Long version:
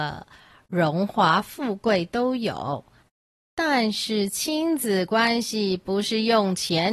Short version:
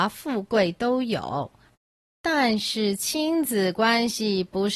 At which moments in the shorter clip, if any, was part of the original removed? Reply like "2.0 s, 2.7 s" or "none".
none